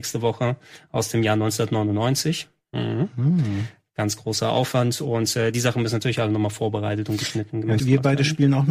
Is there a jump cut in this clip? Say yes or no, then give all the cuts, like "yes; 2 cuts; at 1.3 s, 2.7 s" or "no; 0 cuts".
yes; 1 cut; at 7.8 s